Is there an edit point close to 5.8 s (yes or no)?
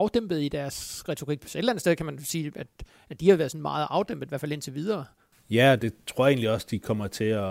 no